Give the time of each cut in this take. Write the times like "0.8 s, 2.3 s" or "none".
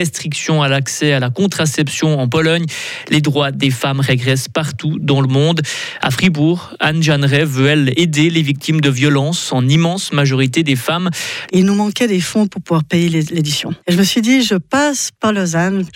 11.5 s, 13.8 s